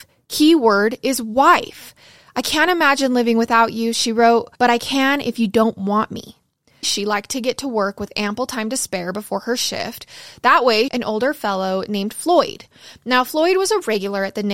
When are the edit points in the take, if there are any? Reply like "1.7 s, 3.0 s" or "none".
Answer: 4.6 s, 6.8 s, 10.9 s